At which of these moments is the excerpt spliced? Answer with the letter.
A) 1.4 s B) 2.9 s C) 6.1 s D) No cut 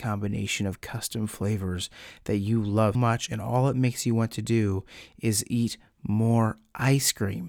B